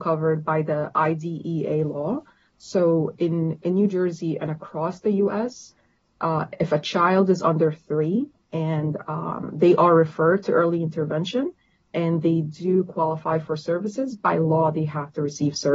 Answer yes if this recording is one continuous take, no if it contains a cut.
yes